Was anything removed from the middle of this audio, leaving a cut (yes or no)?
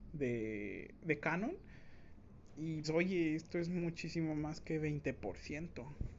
yes